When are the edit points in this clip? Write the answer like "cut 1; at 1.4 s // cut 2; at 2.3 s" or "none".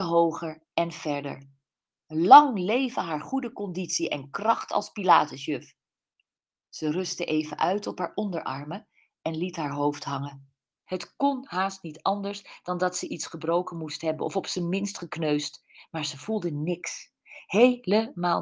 cut 1; at 10.9 s